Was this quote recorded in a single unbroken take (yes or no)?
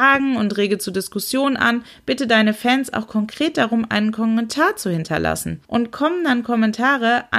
no